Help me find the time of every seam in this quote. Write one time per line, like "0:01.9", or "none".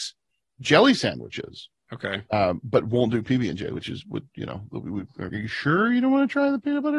0:05.3